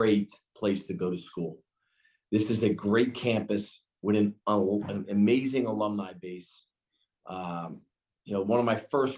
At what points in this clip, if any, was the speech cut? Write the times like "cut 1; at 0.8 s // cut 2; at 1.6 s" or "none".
none